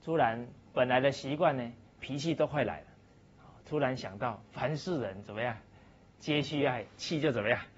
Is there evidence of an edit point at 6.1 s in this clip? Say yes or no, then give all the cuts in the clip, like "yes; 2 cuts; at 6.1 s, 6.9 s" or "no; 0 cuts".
no; 1 cut; at 2.0 s